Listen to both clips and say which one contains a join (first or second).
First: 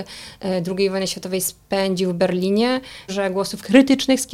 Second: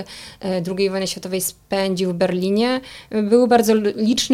first